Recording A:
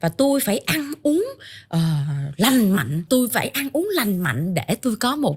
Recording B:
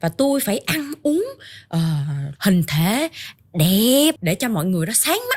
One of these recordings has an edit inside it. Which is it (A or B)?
B